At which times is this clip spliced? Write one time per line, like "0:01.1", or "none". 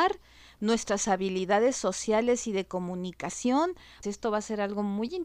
0:04.0